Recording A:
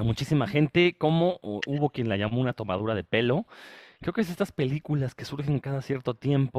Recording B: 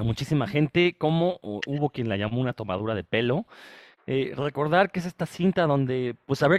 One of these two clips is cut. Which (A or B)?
B